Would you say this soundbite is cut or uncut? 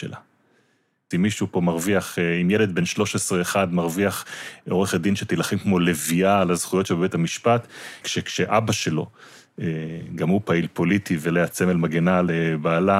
cut